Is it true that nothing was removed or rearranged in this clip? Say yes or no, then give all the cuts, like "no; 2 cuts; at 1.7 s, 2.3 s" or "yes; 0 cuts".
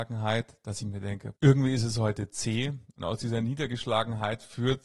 no; 1 cut; at 1.3 s